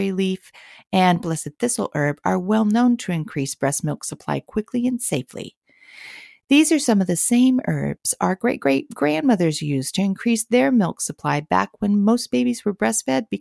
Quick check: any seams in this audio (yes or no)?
no